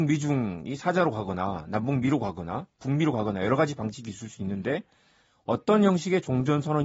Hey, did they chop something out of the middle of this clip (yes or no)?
no